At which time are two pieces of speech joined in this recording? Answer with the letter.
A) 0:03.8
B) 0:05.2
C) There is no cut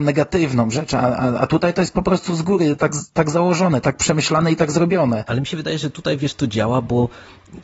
A